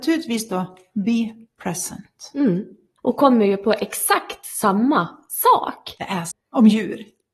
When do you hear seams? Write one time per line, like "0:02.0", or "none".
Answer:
0:03.0
0:06.3